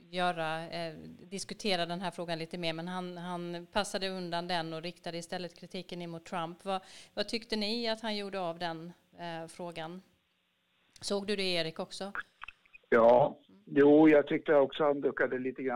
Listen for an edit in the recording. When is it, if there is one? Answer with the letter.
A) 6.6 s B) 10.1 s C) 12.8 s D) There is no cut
D